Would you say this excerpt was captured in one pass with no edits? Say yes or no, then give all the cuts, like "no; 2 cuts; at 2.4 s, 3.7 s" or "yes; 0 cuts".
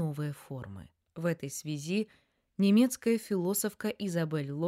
no; 1 cut; at 1.1 s